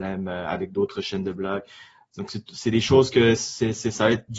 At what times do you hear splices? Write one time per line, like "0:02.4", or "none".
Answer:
none